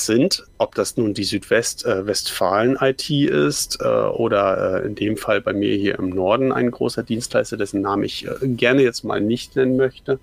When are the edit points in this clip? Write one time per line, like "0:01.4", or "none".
none